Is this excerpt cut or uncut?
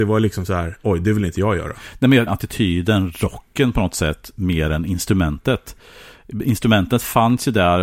cut